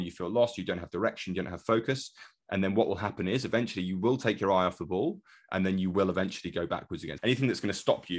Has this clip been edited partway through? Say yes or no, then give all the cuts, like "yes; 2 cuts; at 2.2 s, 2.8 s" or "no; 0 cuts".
yes; 1 cut; at 7.2 s